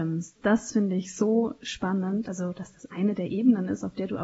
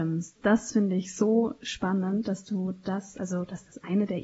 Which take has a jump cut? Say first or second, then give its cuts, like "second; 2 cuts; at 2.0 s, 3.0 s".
first; 1 cut; at 2.2 s